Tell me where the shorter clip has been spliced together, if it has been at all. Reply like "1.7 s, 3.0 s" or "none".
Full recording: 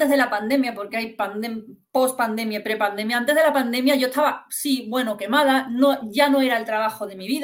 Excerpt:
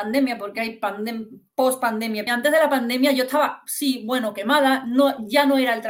2.3 s